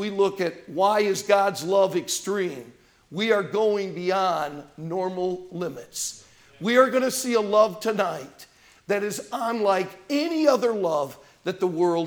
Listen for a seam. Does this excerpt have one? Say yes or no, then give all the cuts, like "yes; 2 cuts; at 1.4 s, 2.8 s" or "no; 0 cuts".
no; 0 cuts